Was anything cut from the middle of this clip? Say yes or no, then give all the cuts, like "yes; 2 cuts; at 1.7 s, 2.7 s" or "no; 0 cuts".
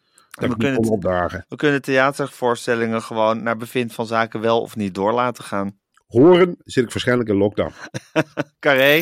no; 0 cuts